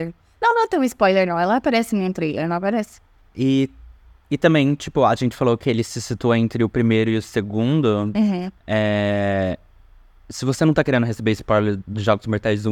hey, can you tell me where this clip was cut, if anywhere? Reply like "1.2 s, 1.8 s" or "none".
3.2 s, 8.6 s